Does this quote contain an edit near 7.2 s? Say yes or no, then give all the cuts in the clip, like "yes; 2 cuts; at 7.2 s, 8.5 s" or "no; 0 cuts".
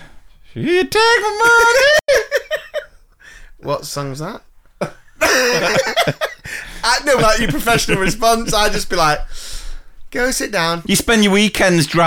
yes; 2 cuts; at 7.2 s, 10.8 s